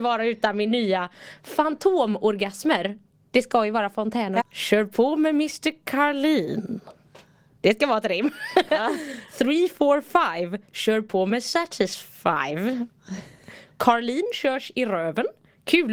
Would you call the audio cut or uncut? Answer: cut